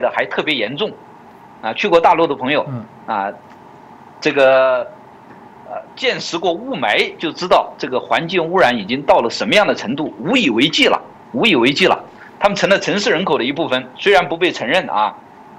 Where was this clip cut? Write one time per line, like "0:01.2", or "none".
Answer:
0:12.4